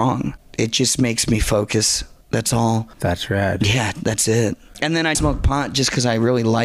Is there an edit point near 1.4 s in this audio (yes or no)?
no